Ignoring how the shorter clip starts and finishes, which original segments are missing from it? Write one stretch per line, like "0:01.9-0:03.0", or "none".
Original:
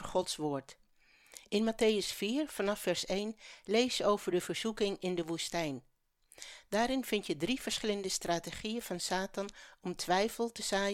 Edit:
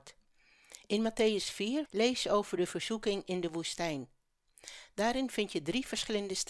0:02.5-0:03.6